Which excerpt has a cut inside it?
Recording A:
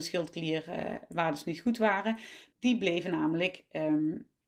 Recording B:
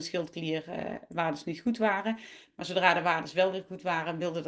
A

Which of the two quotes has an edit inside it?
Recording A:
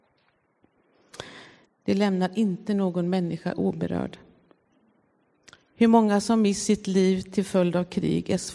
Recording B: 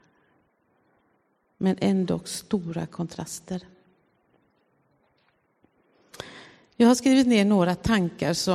A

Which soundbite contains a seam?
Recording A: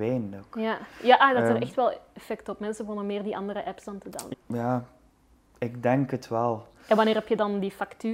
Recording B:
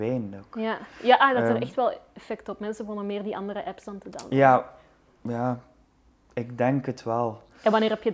A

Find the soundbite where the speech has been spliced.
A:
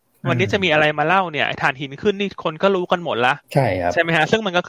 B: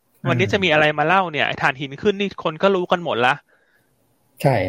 A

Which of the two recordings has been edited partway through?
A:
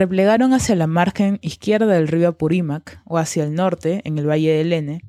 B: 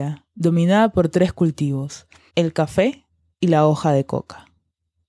B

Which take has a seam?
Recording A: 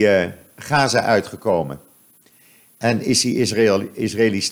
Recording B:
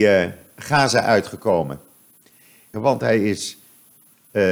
B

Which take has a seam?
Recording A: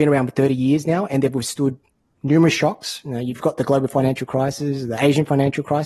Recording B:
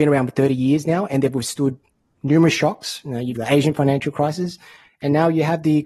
B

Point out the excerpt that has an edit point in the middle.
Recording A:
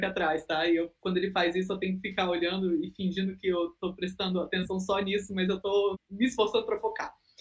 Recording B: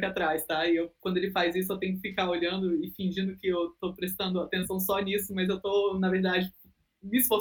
A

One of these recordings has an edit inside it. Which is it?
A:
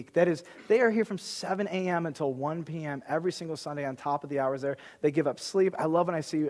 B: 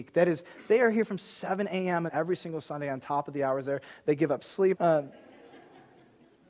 B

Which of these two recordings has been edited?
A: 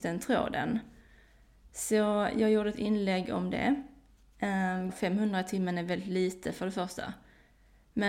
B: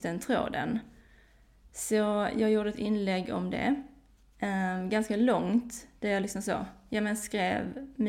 A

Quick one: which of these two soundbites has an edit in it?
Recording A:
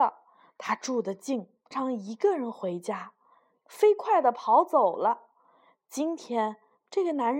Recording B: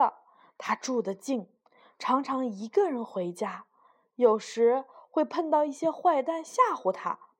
A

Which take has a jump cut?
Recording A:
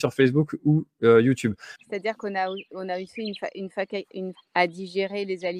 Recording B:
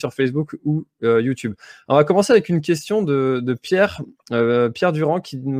A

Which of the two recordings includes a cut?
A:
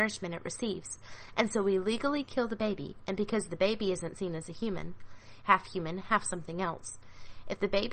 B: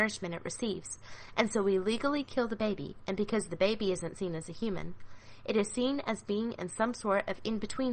A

